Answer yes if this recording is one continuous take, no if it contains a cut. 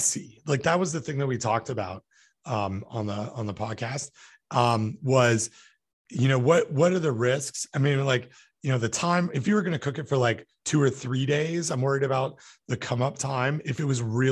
yes